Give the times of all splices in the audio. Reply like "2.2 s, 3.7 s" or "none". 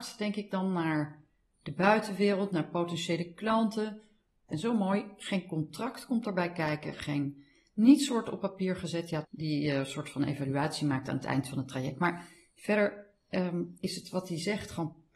4.5 s, 9.2 s